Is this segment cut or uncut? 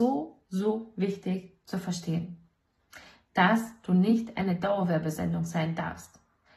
uncut